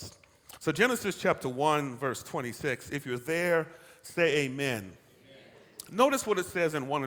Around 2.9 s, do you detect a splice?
no; 0 cuts

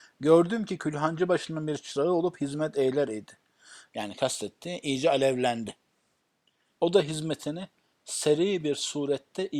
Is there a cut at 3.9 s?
yes; 2 cuts; at 3.9 s, 6.7 s

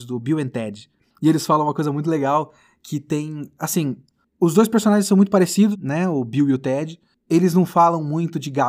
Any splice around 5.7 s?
yes; 1 cut; at 5.7 s

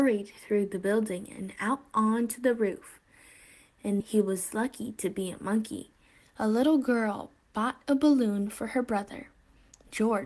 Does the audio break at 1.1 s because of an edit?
no; 2 cuts; at 4.0 s, 6.2 s

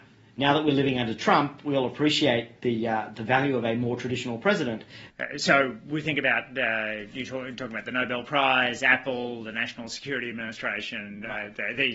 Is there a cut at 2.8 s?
no; 1 cut; at 5.1 s

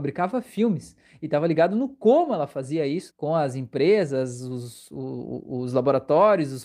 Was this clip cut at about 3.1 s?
yes; 1 cut; at 3.1 s

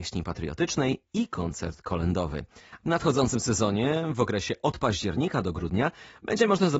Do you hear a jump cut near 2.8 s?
yes; 1 cut; at 2.8 s

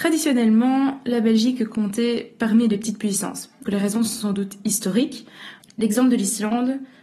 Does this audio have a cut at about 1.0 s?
no; 2 cuts; at 3.7 s, 5.6 s

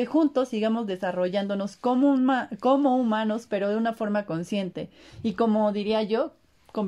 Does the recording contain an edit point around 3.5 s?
yes; 1 cut; at 3.5 s

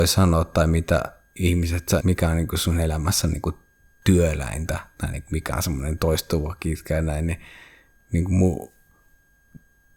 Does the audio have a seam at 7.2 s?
no; 1 cut; at 2.0 s

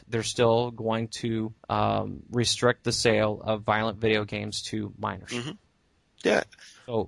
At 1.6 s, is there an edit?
yes; 1 cut; at 1.6 s

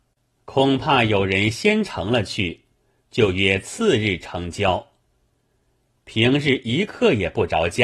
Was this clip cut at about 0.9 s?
no; 1 cut; at 5.9 s

